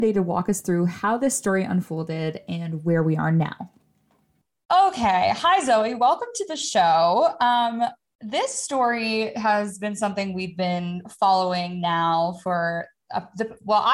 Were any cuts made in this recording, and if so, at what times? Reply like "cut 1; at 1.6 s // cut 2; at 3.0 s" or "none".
none